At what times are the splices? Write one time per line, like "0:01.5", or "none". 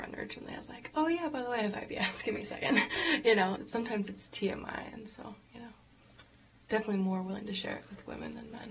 0:03.6